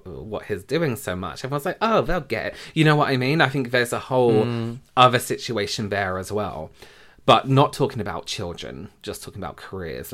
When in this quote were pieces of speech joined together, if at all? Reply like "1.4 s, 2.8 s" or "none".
none